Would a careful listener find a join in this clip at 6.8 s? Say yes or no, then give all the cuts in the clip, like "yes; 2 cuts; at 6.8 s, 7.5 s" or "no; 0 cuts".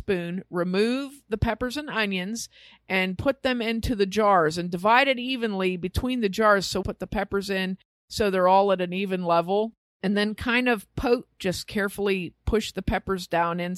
yes; 2 cuts; at 6.8 s, 11.4 s